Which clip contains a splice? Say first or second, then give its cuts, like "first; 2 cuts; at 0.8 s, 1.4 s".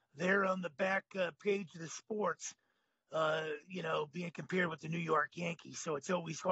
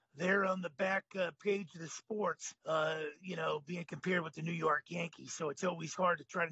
second; 1 cut; at 2.6 s